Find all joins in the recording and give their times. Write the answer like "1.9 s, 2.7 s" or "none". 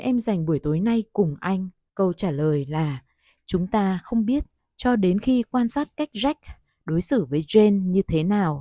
1.9 s